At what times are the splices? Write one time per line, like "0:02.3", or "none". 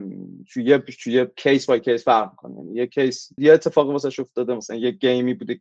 0:03.4